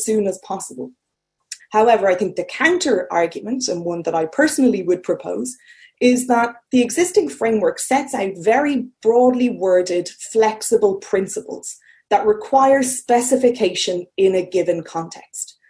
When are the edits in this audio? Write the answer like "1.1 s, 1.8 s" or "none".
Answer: 1.6 s